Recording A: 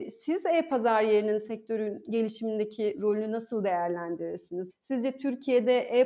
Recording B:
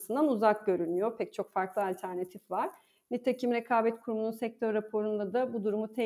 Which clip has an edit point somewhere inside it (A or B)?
A